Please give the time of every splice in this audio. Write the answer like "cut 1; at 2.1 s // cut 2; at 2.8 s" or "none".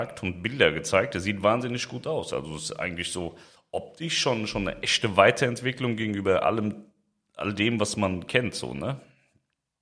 none